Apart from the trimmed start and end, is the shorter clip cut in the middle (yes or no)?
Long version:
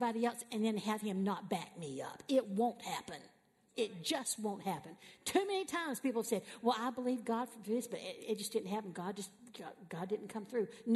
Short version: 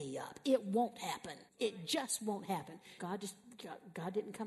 yes